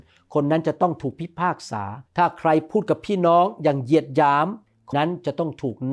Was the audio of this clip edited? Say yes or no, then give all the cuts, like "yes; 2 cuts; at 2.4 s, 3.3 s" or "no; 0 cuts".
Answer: yes; 2 cuts; at 2.1 s, 4.9 s